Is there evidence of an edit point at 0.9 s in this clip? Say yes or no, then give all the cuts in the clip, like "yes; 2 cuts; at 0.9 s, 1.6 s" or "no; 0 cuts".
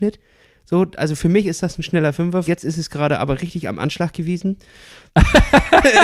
no; 2 cuts; at 2.5 s, 5.1 s